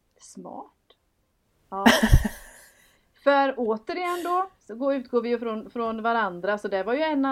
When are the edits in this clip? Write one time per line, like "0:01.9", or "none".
none